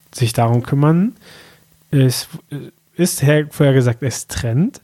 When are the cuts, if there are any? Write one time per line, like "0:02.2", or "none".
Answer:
none